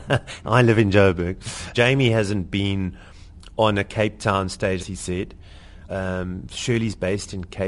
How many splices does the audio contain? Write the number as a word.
three